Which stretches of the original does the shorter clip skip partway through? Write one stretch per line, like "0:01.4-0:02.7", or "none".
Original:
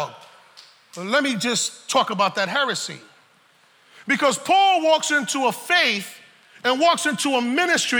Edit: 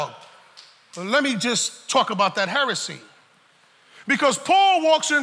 none